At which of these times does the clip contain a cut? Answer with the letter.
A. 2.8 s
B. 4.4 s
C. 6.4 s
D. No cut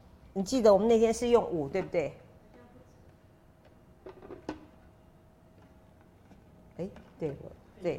D